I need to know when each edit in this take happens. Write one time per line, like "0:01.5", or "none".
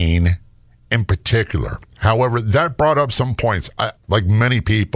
0:04.0